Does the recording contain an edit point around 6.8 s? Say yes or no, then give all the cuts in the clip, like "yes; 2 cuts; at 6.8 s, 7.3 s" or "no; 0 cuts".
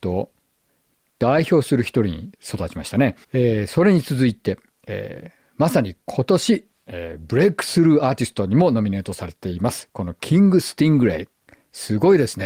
no; 1 cut; at 3.2 s